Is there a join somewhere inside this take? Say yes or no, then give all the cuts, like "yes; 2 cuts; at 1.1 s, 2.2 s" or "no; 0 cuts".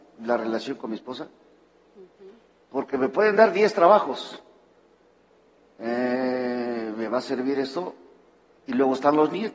yes; 1 cut; at 8.6 s